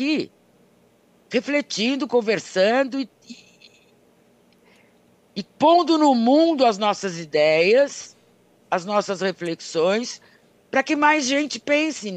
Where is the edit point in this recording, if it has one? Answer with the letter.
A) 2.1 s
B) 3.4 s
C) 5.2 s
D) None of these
D